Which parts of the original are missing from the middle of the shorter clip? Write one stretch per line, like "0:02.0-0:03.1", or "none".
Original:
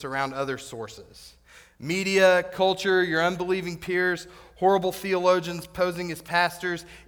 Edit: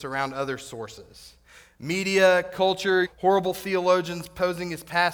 0:03.0-0:04.4